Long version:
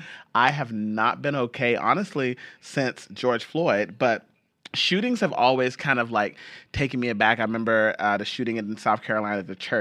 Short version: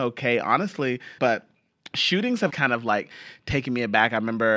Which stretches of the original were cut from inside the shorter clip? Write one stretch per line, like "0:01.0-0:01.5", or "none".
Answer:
0:02.5-0:04.0
0:05.3-0:05.8